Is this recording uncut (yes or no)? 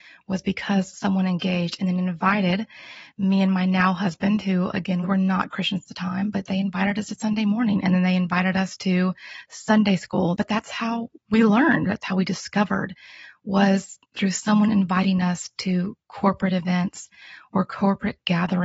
no